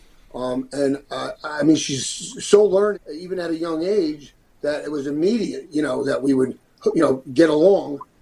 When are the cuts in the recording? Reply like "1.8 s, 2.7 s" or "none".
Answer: 2.9 s